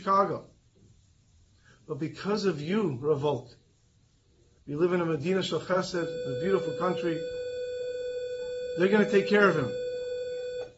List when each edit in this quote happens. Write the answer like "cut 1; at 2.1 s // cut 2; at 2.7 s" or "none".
cut 1; at 4.6 s